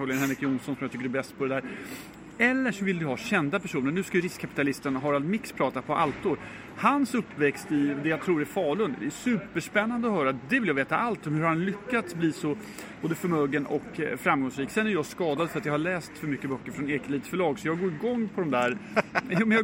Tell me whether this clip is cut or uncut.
uncut